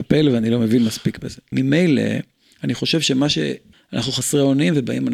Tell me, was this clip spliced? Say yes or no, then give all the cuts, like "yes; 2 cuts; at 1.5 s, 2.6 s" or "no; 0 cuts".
yes; 2 cuts; at 1.5 s, 3.7 s